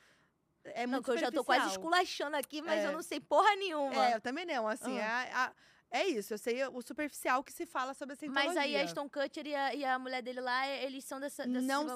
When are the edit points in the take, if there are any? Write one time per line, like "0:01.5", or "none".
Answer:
none